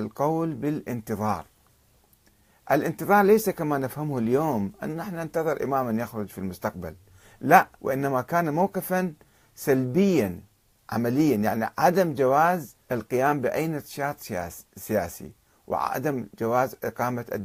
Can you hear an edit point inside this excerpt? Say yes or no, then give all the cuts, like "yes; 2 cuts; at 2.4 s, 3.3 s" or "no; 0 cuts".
yes; 2 cuts; at 7.7 s, 12.8 s